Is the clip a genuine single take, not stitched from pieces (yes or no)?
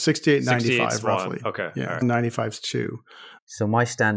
no